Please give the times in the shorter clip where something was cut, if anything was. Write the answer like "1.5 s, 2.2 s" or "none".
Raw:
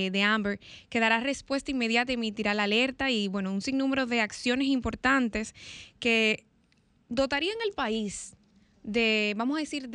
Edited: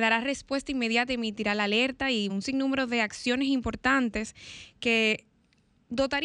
2.3 s